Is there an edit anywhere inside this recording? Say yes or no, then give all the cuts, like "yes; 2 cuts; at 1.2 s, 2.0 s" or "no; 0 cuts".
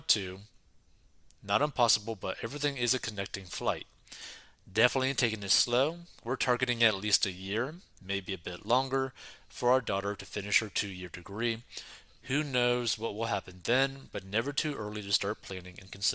no; 0 cuts